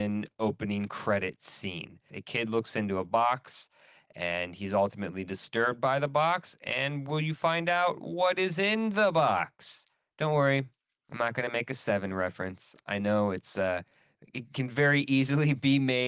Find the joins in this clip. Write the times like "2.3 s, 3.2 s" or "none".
2.1 s

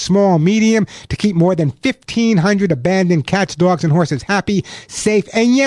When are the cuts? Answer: none

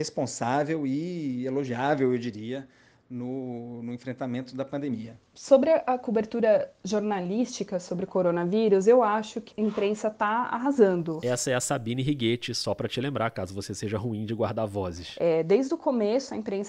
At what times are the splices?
9.5 s

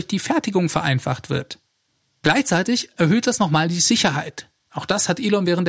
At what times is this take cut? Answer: none

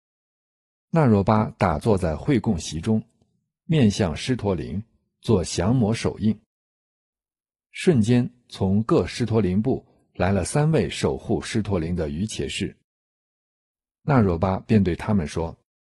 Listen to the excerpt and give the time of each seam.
none

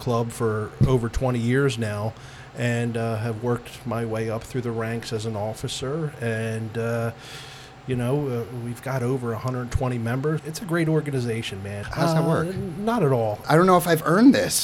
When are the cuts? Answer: 10.4 s, 11.8 s, 13.4 s

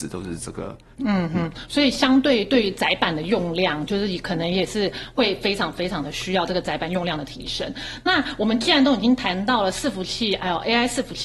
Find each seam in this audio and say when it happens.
1.0 s

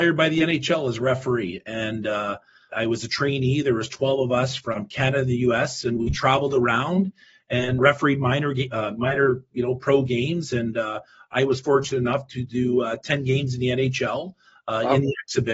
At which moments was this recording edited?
2.7 s, 7.8 s

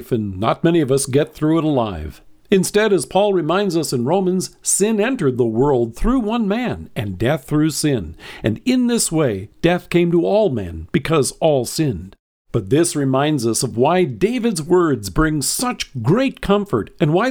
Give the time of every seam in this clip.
2.4 s

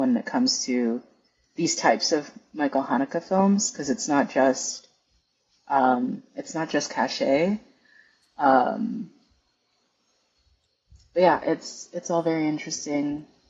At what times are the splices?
none

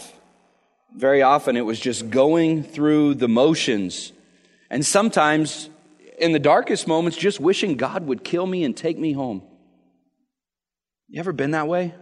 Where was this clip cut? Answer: none

